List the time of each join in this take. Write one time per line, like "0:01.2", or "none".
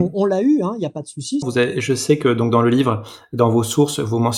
0:01.4

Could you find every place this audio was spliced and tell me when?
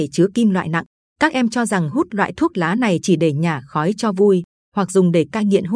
0:01.0

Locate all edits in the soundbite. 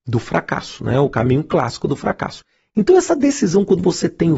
none

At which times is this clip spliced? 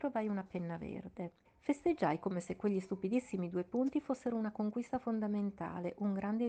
0:01.5

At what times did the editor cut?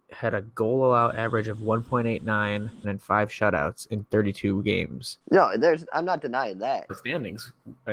0:02.8
0:05.2
0:06.9

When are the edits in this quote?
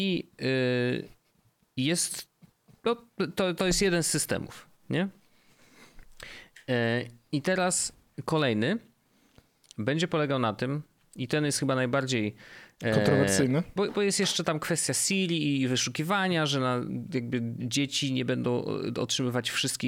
0:13.8

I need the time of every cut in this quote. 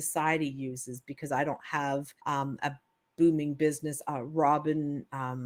0:02.2
0:04.0

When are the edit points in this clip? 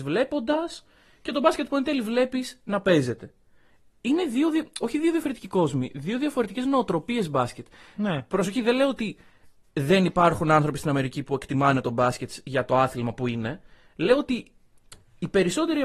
none

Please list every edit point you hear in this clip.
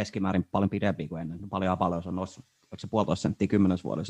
none

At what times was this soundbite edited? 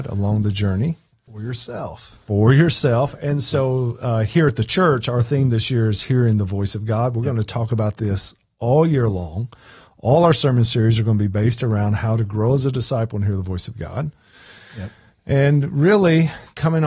none

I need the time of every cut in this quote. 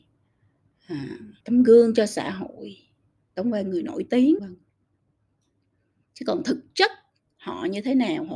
0:01.4
0:04.4

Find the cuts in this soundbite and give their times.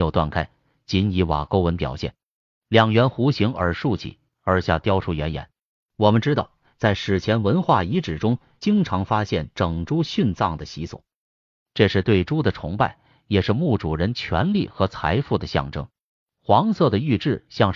0:05.8
0:16.2

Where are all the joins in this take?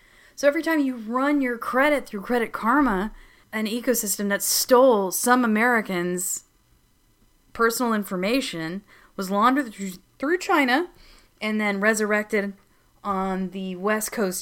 0:03.4

